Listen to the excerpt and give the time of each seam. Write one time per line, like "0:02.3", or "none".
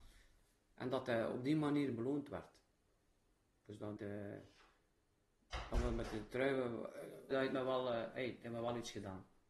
0:04.0
0:07.3